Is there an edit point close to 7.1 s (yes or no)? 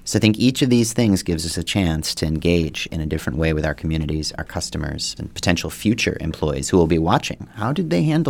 no